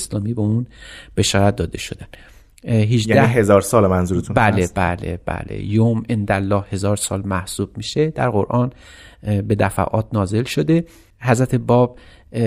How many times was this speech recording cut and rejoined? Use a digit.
0